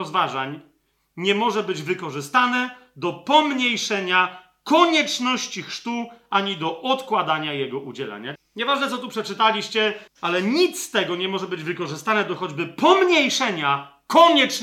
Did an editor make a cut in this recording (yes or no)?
yes